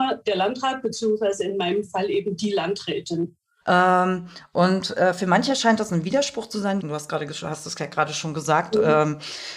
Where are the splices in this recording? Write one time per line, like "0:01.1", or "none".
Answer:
0:03.6
0:06.8